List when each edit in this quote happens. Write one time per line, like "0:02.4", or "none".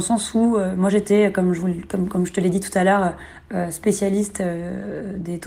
none

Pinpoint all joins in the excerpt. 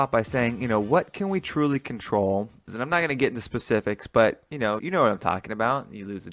0:02.7
0:04.8

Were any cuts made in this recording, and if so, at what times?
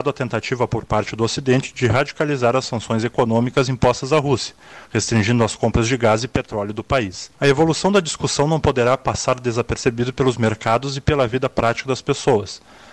0:07.3

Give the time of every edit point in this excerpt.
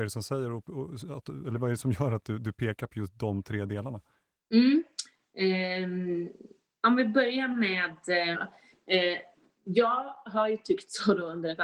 0:08.3

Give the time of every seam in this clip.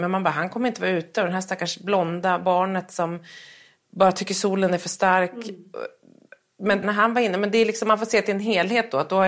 0:06.8

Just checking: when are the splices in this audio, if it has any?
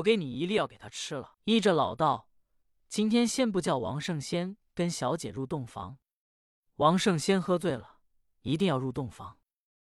0:01.3

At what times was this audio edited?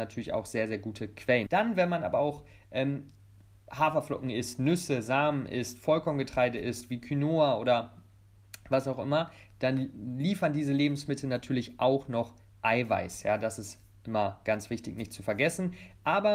0:01.5

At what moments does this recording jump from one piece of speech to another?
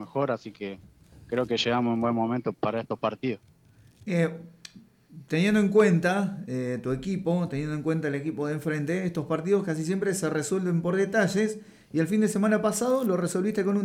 0:02.5

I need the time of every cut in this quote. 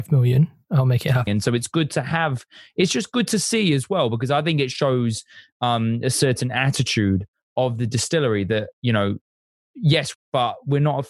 0:01.3
0:10.1

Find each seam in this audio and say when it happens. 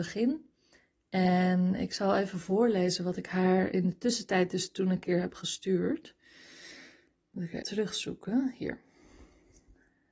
0:07.6

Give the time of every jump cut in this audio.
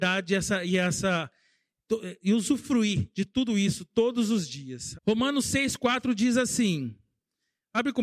0:04.9

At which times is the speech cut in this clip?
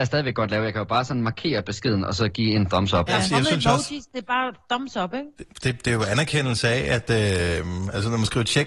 0:03.1

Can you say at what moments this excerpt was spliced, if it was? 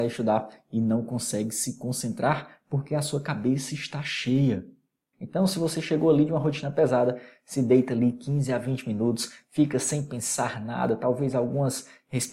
0:05.1

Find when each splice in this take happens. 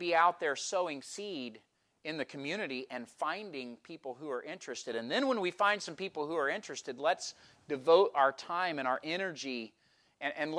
none

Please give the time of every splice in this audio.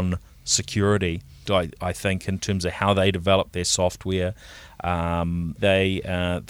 0:01.4
0:05.6

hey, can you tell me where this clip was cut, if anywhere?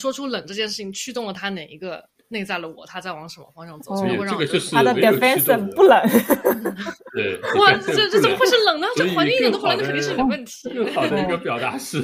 none

